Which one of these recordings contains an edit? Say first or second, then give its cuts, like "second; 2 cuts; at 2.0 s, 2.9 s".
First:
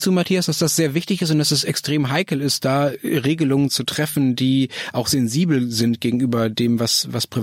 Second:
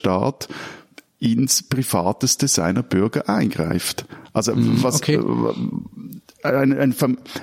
second; 1 cut; at 1.1 s